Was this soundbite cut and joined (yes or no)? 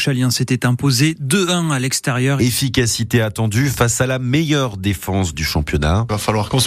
yes